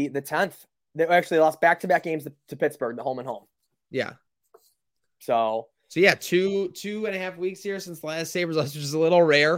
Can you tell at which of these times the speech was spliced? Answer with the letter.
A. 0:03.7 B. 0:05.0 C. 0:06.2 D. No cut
D